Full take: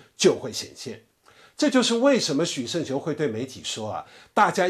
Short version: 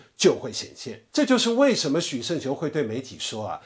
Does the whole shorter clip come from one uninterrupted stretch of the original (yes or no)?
no